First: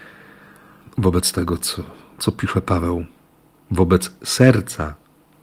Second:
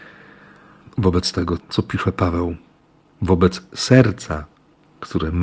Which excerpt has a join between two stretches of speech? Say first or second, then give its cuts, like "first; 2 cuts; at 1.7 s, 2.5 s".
second; 1 cut; at 1.6 s